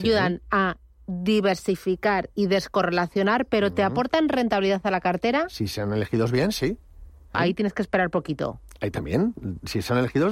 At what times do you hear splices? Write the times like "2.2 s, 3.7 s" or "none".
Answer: 7.3 s